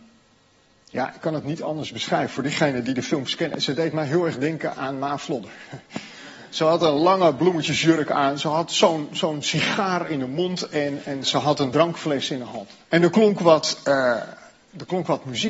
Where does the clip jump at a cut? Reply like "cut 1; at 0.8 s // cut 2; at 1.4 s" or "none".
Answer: cut 1; at 12.8 s